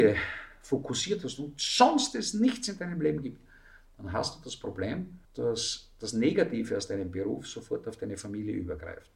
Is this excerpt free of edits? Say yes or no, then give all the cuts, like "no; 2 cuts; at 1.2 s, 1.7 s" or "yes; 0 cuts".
no; 1 cut; at 5.2 s